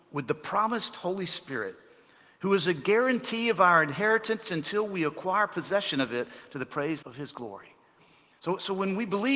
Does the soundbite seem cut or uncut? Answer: cut